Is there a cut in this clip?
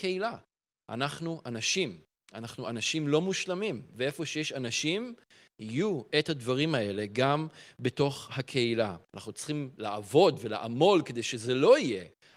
yes; 1 cut; at 9.1 s

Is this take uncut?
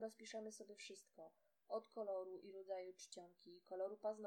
yes; 0 cuts

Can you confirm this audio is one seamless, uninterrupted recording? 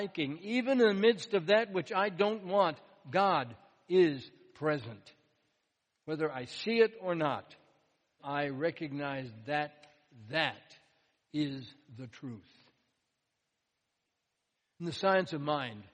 no; 1 cut; at 8.2 s

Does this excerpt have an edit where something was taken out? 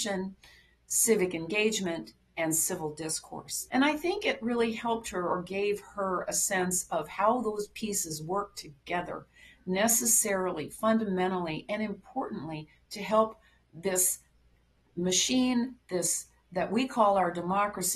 yes; 1 cut; at 3.7 s

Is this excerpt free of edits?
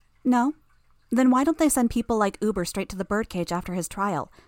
yes; 0 cuts

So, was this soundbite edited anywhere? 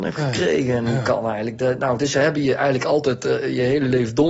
no; 0 cuts

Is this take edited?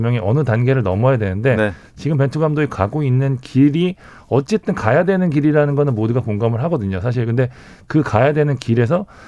no; 0 cuts

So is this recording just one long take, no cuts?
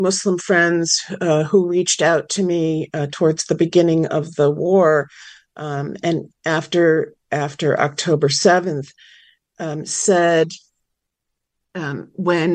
yes; 0 cuts

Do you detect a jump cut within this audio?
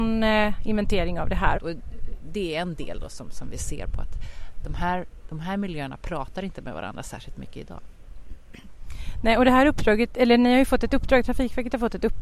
yes; 1 cut; at 1.5 s

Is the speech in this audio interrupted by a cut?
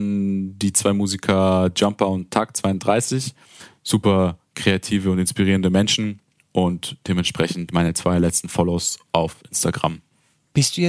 yes; 1 cut; at 3.8 s

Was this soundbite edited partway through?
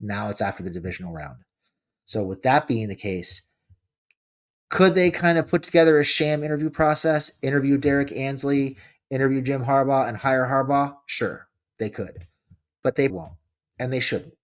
yes; 1 cut; at 13.1 s

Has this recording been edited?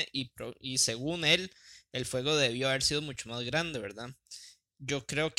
no; 0 cuts

